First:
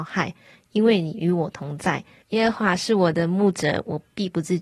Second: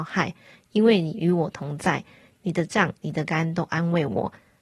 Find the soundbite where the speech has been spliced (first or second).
first